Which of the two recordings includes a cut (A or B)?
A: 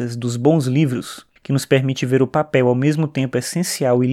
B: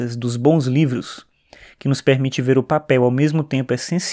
A